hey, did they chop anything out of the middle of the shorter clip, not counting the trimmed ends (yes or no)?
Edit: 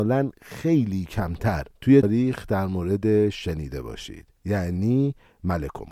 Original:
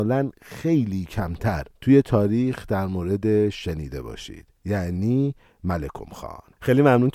yes